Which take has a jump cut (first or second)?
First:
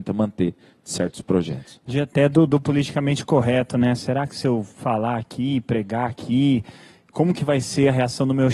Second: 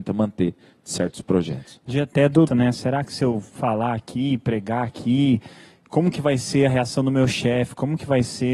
second